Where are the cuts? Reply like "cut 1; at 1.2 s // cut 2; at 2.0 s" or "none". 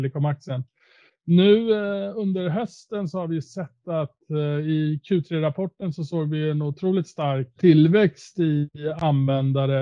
cut 1; at 7.6 s